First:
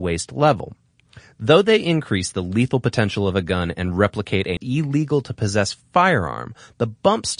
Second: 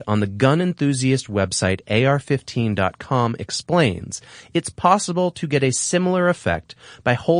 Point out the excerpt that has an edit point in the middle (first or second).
first